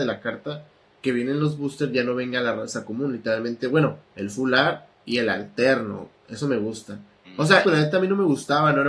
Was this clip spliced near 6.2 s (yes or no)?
no